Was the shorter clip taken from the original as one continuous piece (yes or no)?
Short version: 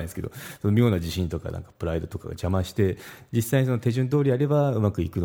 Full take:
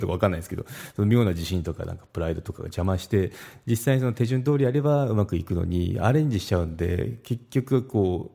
yes